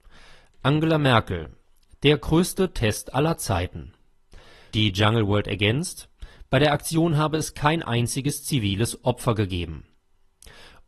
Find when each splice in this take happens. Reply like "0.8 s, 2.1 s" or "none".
4.7 s